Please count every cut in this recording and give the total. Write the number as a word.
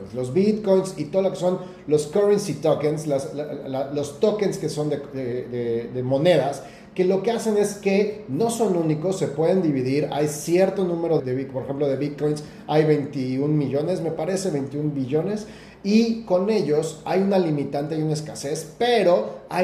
one